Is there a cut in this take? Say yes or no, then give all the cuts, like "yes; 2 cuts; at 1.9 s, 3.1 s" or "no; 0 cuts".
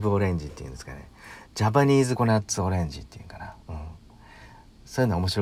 yes; 2 cuts; at 2.2 s, 3.6 s